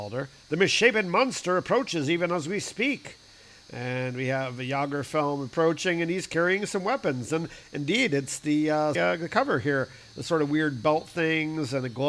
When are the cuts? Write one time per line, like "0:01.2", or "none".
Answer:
0:08.9